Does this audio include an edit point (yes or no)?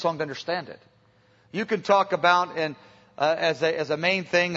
no